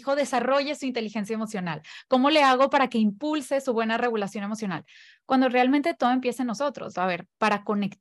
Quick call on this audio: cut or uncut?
cut